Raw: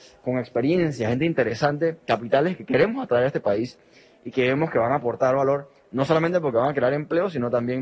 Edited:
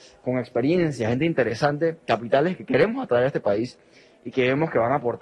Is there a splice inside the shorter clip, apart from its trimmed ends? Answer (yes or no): no